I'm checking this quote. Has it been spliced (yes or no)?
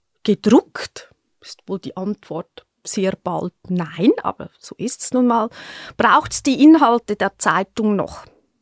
yes